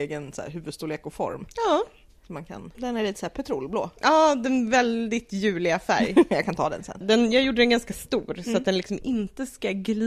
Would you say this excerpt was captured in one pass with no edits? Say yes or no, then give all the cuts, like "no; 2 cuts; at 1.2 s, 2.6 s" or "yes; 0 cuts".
no; 2 cuts; at 2.7 s, 7.0 s